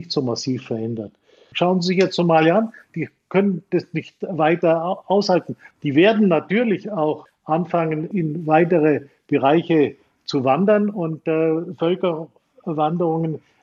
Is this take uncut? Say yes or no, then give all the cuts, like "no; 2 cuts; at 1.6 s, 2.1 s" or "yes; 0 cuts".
yes; 0 cuts